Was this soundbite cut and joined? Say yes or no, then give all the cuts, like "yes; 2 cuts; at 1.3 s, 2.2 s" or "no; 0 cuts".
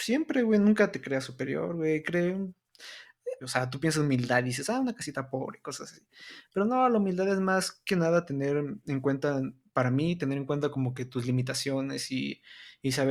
yes; 1 cut; at 3.4 s